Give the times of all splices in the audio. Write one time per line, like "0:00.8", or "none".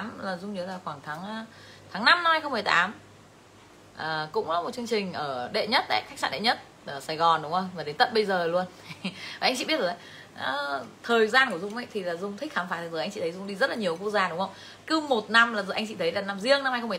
0:14.8